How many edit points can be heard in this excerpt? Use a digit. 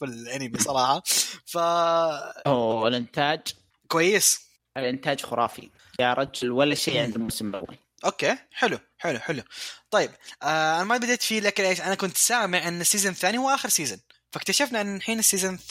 0